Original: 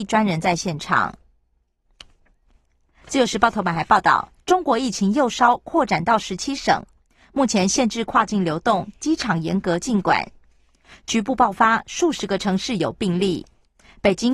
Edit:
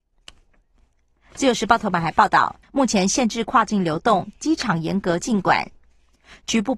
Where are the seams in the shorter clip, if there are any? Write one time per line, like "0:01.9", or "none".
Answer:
0:02.6